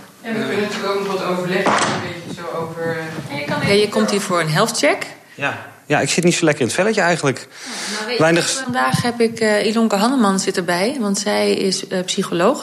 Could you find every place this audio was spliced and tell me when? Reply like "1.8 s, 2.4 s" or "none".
8.6 s

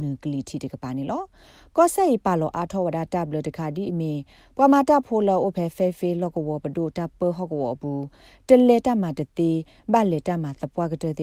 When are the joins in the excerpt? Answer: none

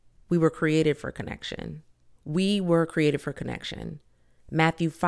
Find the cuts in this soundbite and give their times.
2.1 s

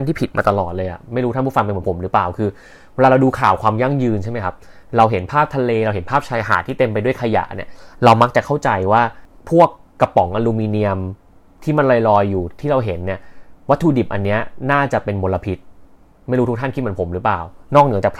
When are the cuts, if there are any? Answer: none

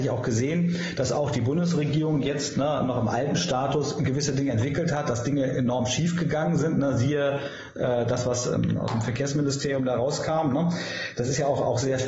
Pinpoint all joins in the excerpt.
none

